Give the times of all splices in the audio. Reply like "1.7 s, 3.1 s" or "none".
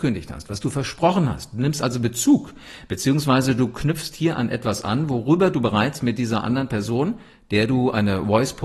none